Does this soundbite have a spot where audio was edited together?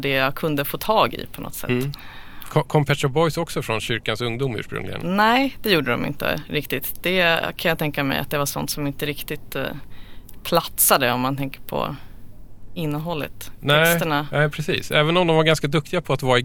no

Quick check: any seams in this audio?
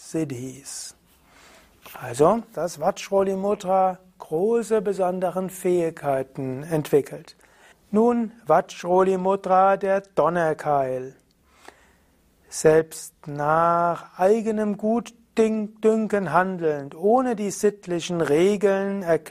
yes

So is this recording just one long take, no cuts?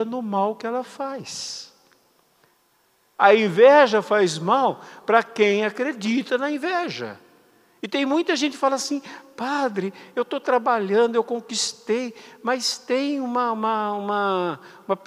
yes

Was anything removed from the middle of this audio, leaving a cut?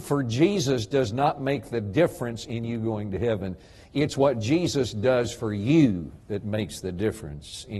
no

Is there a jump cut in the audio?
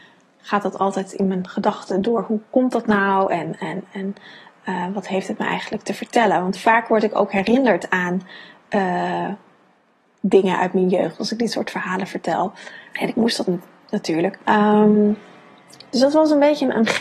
yes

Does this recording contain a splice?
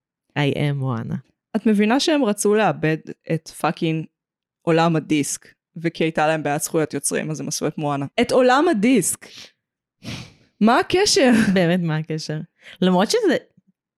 yes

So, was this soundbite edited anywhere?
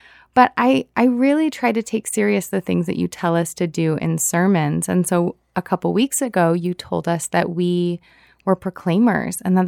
no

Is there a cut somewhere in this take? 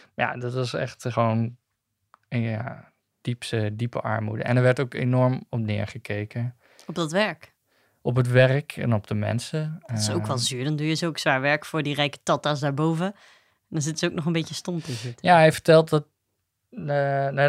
no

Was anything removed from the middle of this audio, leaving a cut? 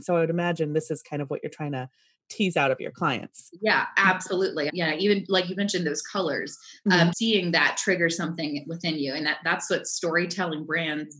yes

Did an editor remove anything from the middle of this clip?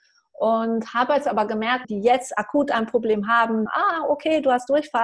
yes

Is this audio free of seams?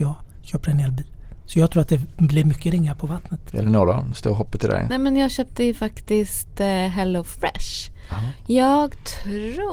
yes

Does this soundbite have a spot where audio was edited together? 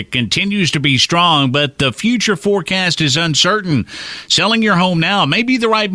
no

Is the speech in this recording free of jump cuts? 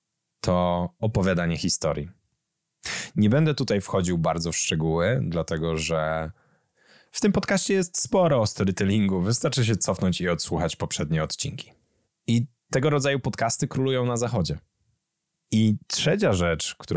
no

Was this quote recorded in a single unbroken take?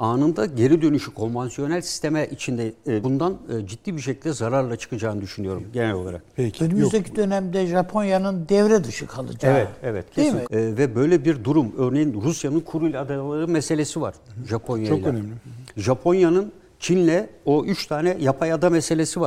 no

